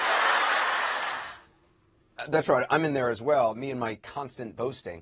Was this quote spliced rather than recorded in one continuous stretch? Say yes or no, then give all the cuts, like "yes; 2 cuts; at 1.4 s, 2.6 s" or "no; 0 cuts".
no; 0 cuts